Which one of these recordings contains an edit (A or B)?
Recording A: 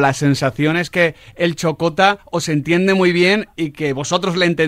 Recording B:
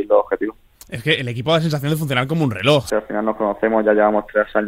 B